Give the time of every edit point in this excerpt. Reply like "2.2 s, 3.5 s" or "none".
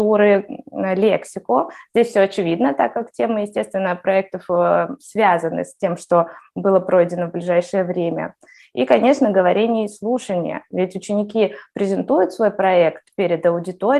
none